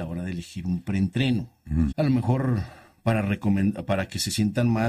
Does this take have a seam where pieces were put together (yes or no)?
yes